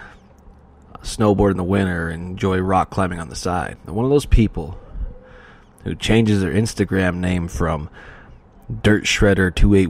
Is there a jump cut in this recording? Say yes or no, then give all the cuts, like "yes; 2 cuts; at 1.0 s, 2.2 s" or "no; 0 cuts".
no; 0 cuts